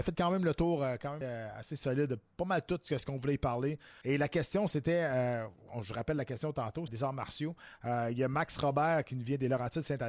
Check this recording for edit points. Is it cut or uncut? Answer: cut